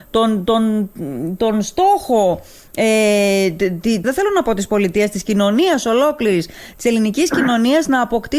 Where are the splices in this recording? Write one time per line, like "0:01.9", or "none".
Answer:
0:04.0